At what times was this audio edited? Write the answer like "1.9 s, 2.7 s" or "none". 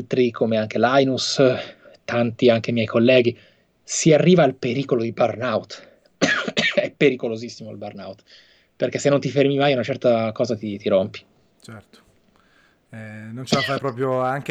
none